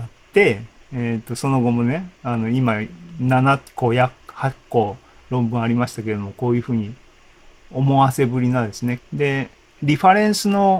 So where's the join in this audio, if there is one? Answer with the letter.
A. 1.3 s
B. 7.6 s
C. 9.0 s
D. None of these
C